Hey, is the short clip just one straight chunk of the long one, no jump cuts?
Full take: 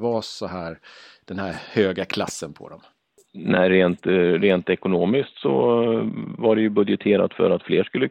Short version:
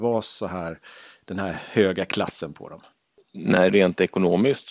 no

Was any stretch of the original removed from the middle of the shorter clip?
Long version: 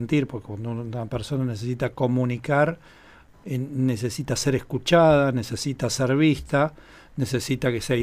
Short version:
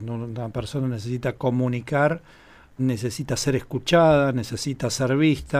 yes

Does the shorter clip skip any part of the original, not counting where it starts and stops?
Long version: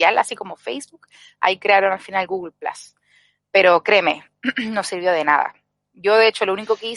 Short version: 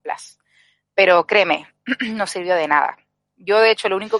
no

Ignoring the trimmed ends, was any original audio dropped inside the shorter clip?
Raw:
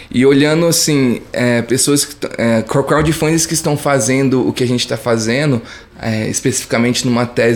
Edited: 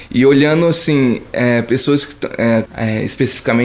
yes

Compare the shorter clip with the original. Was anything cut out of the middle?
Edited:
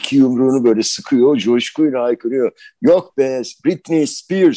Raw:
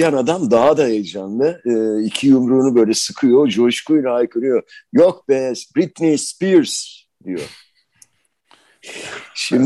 no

